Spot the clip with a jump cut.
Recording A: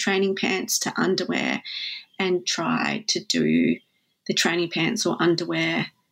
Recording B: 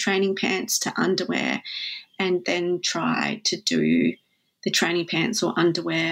A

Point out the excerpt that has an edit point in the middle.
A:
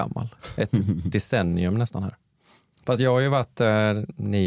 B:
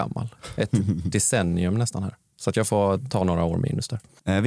B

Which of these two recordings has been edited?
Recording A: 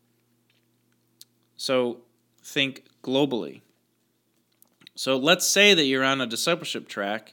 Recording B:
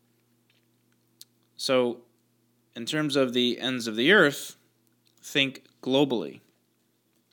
A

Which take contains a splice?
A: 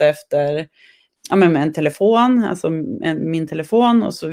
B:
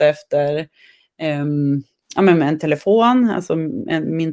A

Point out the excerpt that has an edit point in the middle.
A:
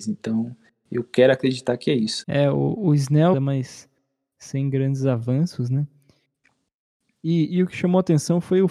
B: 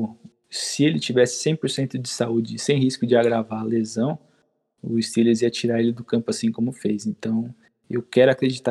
A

